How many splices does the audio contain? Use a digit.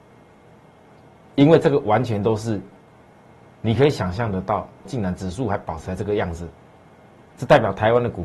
1